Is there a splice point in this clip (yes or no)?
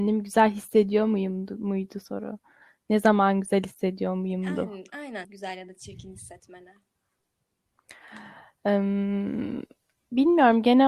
yes